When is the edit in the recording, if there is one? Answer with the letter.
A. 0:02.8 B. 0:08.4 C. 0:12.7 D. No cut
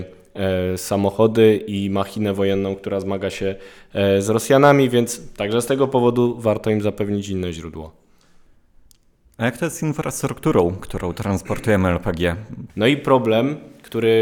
C